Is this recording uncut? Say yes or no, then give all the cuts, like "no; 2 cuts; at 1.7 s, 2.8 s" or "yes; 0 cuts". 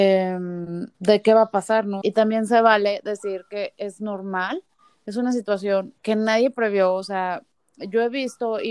no; 3 cuts; at 0.9 s, 2.0 s, 6.0 s